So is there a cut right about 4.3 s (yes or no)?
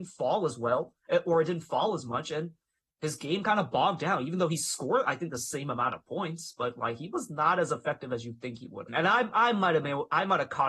no